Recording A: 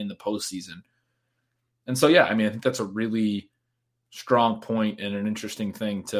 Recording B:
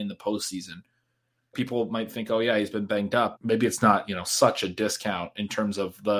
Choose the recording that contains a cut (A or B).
B